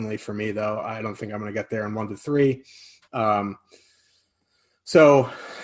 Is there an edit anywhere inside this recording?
yes; 1 cut; at 3.1 s

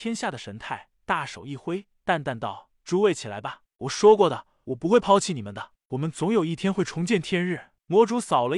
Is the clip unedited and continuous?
yes; 0 cuts

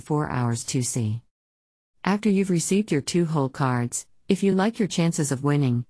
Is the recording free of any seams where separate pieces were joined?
yes; 0 cuts

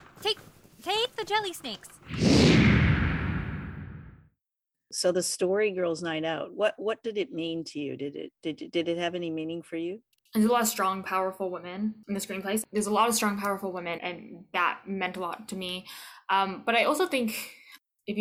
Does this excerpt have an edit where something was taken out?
yes; 1 cut; at 14.0 s

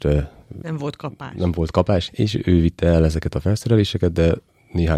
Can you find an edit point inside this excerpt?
yes; 1 cut; at 2.1 s

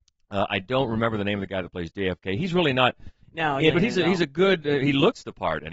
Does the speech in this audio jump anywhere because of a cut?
yes; 1 cut; at 3.7 s

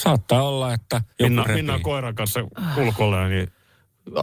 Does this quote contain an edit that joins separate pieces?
yes; 1 cut; at 1.1 s

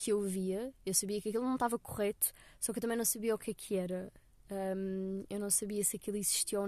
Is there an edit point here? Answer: no; 0 cuts

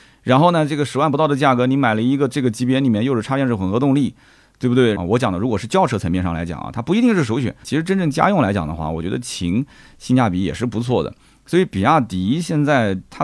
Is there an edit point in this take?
yes; 2 cuts; at 5.0 s, 7.6 s

